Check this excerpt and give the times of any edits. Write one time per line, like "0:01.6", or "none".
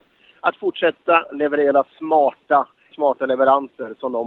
0:02.9